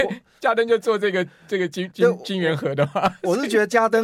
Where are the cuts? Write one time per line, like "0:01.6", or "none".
0:01.9